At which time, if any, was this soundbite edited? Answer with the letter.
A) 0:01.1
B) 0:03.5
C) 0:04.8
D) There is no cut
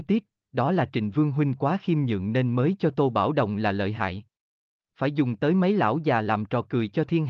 C